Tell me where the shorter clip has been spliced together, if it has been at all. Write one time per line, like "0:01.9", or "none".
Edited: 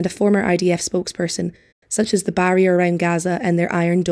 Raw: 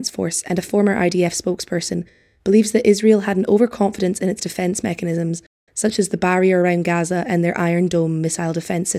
0:01.7